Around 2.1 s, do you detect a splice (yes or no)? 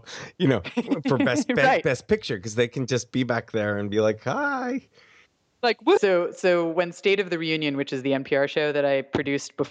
no